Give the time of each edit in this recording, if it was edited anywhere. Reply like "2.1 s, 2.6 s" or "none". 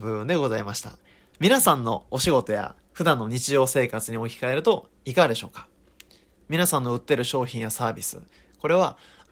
none